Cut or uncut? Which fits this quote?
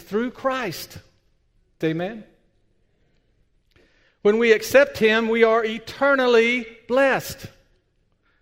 cut